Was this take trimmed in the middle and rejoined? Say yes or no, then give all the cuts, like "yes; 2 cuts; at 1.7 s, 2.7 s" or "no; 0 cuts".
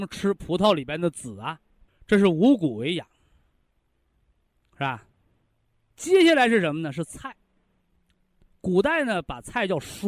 yes; 1 cut; at 1.9 s